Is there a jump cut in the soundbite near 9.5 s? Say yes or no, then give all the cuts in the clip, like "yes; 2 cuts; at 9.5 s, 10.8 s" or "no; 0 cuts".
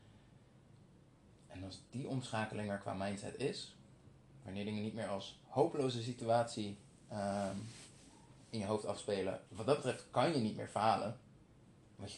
yes; 1 cut; at 9.5 s